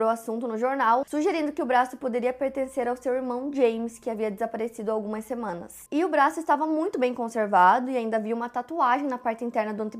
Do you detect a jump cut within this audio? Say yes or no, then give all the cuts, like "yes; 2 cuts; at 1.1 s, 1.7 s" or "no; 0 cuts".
yes; 2 cuts; at 1.0 s, 5.9 s